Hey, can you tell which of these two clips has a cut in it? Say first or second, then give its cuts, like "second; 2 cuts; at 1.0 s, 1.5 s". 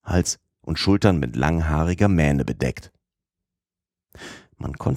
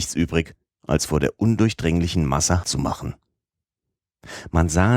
second; 1 cut; at 2.6 s